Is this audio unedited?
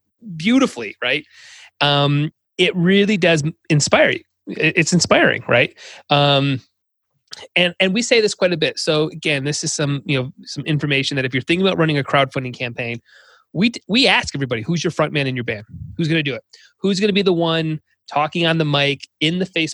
yes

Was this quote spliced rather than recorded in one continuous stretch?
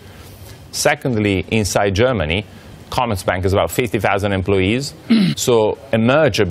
yes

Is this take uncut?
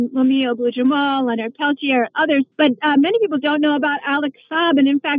no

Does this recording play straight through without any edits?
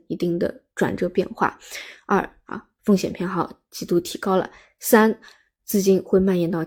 yes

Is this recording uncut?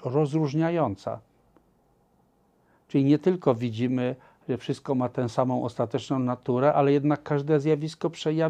yes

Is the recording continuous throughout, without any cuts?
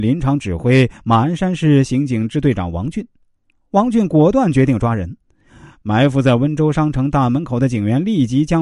yes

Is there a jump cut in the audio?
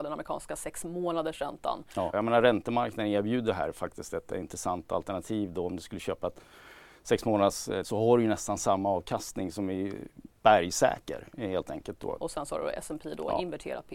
yes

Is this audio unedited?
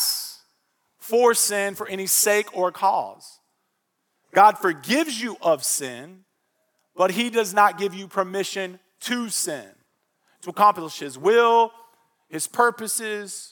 yes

